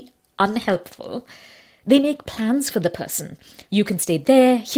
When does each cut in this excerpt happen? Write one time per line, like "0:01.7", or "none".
0:03.7